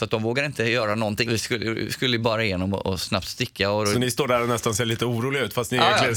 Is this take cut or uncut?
cut